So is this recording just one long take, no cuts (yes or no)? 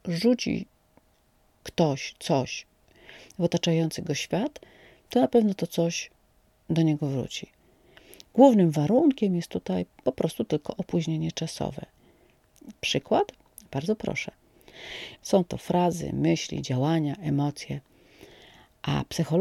no